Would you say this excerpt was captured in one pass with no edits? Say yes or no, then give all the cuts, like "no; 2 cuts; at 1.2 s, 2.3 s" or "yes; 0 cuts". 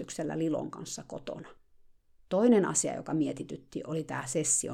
yes; 0 cuts